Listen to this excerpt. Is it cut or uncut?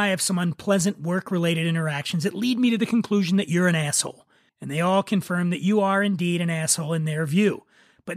cut